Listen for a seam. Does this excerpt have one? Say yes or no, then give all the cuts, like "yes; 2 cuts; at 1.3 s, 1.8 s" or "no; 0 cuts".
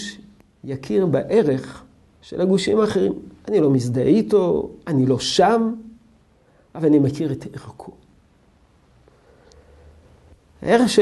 no; 0 cuts